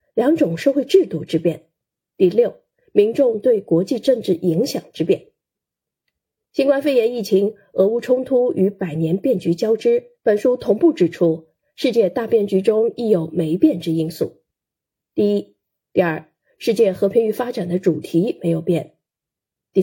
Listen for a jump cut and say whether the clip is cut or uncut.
cut